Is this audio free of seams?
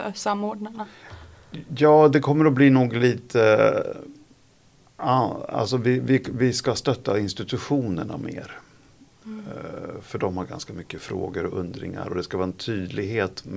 yes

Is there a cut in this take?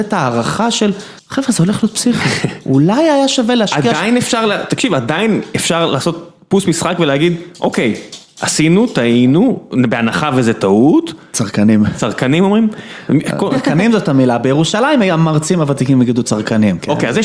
yes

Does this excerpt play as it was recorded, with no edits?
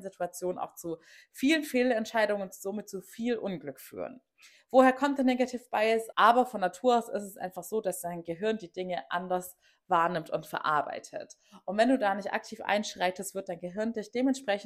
no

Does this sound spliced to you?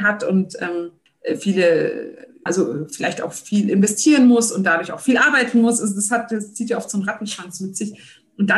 yes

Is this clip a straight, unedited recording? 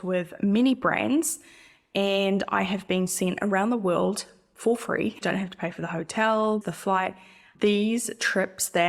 no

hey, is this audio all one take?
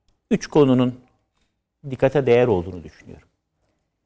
yes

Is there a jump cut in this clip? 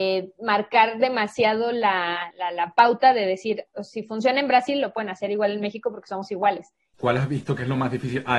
yes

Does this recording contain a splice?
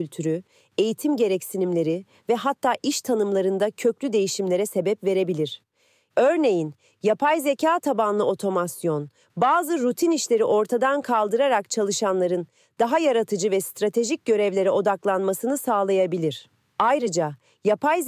no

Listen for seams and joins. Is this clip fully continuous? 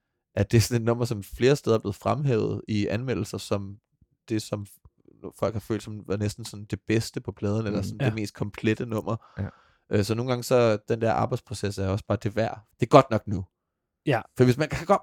no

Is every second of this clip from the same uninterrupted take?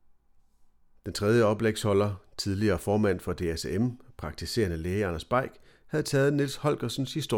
yes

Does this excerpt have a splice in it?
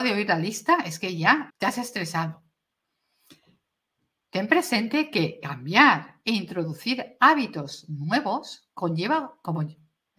yes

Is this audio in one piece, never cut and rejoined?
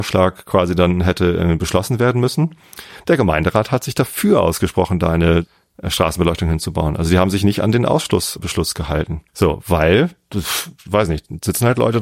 no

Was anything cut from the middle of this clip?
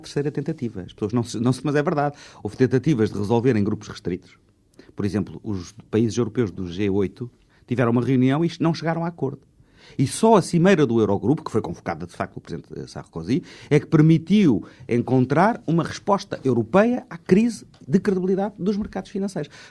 yes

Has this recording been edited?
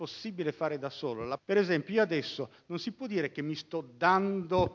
yes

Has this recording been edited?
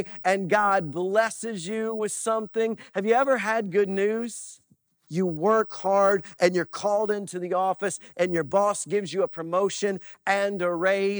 yes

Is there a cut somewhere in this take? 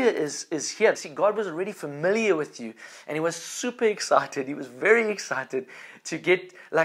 yes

